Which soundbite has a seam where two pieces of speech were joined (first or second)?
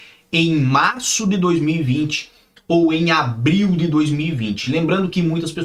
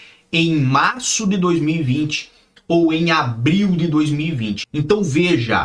second